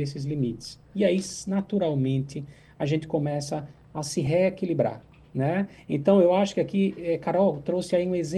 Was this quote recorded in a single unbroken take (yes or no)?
yes